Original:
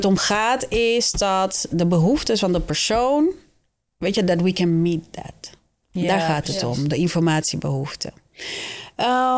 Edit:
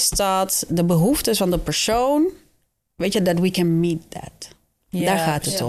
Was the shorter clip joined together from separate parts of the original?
no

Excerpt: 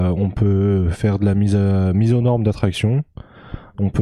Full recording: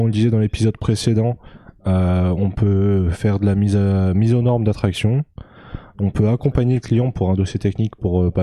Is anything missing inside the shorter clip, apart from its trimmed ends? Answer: no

